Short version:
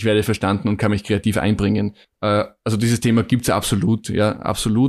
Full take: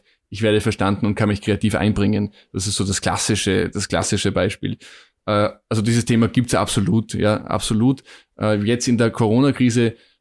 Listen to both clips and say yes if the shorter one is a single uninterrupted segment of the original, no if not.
no